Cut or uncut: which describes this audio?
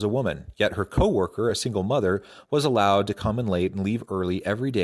uncut